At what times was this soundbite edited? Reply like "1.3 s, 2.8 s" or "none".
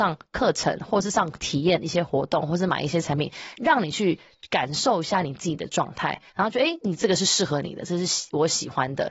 none